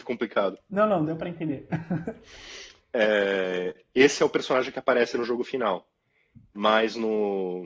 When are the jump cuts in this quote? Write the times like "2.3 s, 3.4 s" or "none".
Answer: 1.0 s